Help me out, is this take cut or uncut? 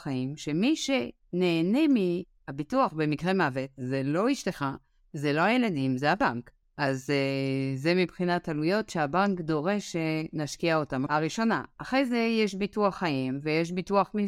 cut